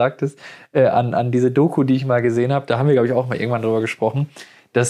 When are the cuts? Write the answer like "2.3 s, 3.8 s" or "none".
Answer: none